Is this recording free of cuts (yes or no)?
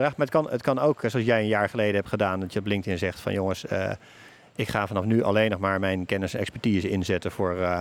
yes